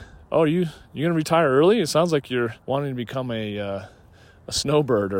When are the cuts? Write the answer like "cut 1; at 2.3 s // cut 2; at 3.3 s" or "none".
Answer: cut 1; at 2.6 s

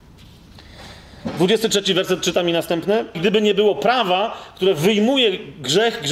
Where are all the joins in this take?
cut 1; at 3.1 s

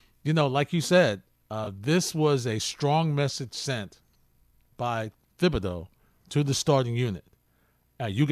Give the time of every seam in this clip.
none

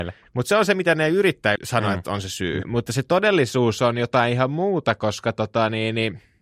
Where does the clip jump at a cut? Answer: cut 1; at 1.6 s // cut 2; at 2.6 s

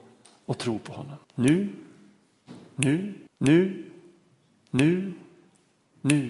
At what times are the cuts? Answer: cut 1; at 1.2 s // cut 2; at 3.3 s

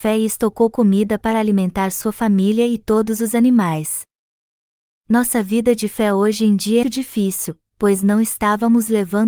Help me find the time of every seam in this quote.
cut 1; at 6.8 s

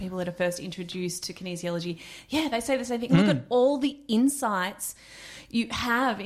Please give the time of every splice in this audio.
cut 1; at 3.1 s

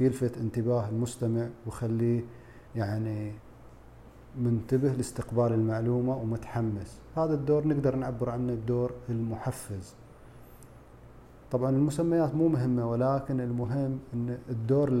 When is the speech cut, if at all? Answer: cut 1; at 2.7 s

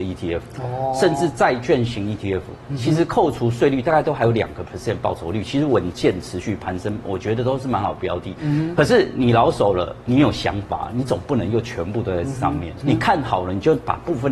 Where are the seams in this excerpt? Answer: cut 1; at 12.8 s

